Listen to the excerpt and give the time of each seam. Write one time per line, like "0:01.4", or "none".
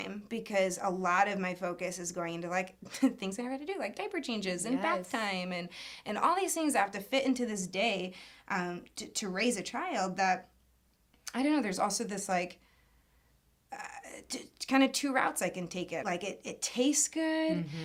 0:16.0